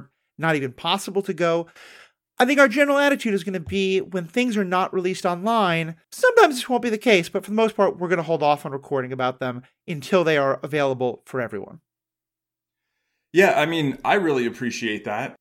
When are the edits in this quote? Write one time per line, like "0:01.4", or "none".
0:06.0